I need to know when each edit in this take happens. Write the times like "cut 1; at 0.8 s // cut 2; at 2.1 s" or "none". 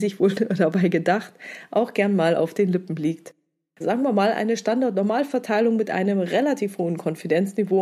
cut 1; at 3.8 s

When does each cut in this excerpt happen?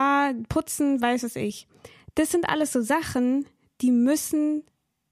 none

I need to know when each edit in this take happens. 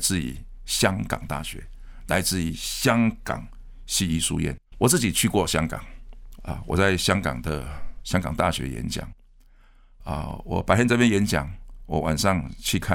cut 1; at 4.7 s // cut 2; at 6.4 s

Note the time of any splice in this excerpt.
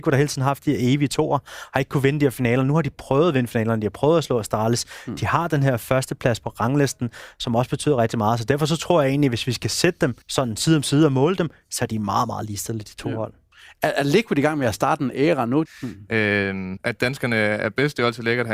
cut 1; at 10.2 s // cut 2; at 15.7 s // cut 3; at 16.8 s

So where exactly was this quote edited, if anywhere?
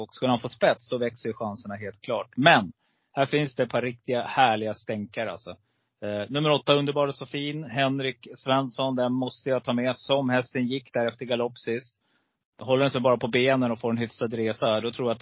none

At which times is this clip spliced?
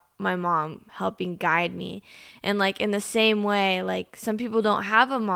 none

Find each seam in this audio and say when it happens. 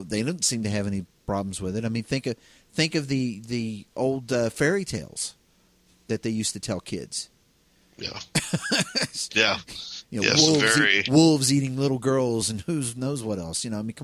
none

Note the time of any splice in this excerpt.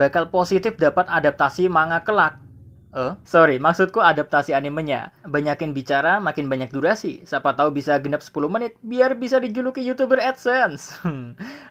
cut 1; at 3.2 s // cut 2; at 5.2 s

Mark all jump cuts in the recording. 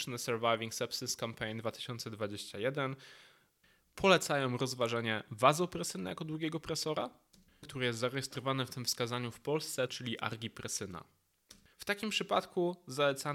cut 1; at 7.6 s // cut 2; at 9.9 s // cut 3; at 11.7 s

